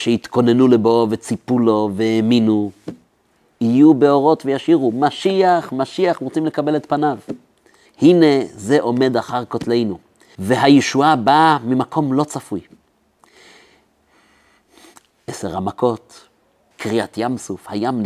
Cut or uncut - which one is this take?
cut